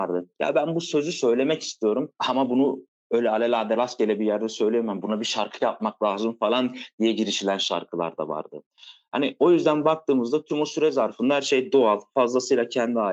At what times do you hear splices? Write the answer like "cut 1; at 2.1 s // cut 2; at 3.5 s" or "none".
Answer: cut 1; at 2.2 s